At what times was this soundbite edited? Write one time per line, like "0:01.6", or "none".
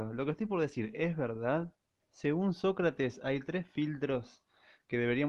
0:02.0